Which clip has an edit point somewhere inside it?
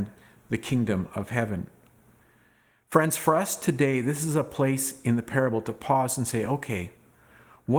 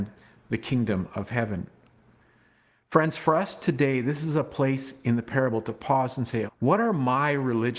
second; 1 cut; at 6.5 s

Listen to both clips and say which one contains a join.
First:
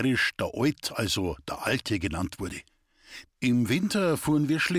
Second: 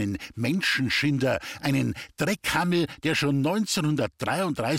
first; 1 cut; at 3.2 s

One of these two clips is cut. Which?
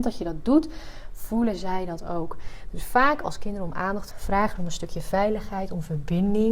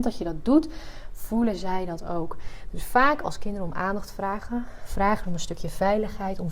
first; 1 cut; at 4.1 s

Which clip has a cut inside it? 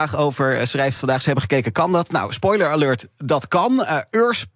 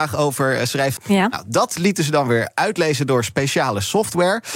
second; 1 cut; at 1.0 s

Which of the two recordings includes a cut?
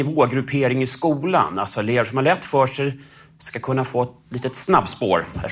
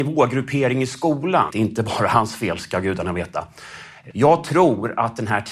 second; 2 cuts; at 1.5 s, 4.1 s

